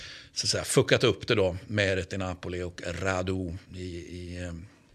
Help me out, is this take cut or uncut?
uncut